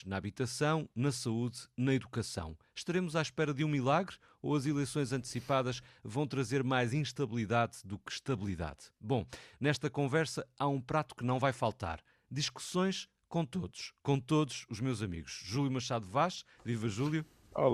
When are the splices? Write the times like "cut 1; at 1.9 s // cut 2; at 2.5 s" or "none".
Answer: none